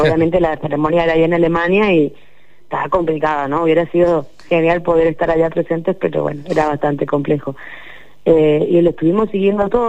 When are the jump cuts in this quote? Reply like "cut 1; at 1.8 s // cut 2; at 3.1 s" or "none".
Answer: none